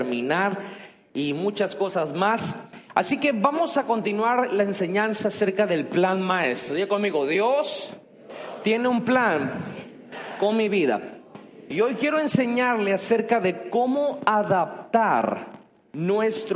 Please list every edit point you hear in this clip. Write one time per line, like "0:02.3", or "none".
none